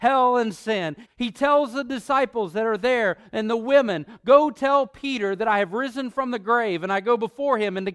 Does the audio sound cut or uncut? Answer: cut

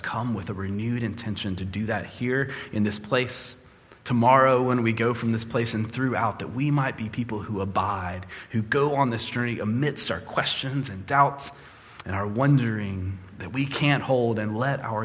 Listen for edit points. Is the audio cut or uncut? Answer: uncut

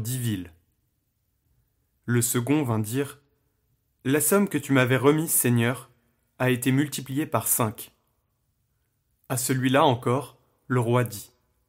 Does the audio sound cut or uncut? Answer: uncut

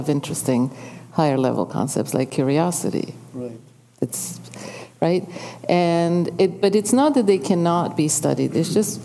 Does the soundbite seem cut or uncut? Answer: uncut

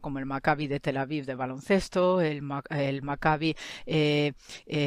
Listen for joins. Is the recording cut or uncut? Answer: uncut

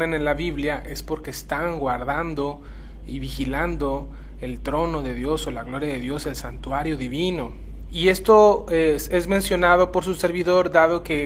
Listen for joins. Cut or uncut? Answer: cut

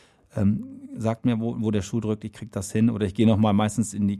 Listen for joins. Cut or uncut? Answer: uncut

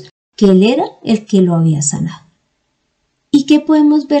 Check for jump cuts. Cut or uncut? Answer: uncut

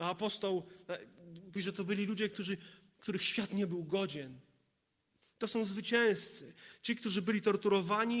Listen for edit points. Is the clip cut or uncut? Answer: cut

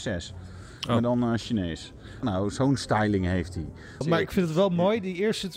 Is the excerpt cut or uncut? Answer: cut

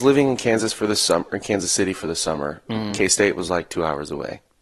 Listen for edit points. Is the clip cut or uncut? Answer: uncut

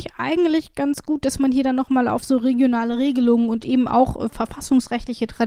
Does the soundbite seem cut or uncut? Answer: uncut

